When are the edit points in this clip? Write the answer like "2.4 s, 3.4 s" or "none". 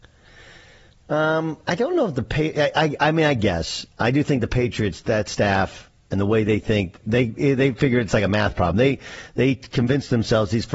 7.0 s